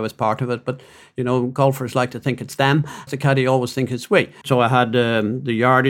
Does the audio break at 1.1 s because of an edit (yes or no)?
no